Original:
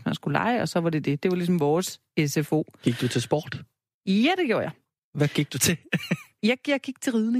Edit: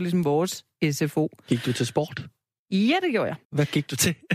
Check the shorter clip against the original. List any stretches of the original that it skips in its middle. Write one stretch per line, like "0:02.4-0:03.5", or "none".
0:04.8-0:05.1